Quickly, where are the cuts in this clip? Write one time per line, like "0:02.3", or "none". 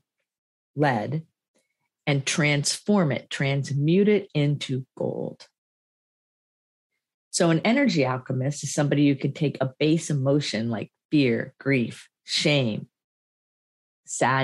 0:12.2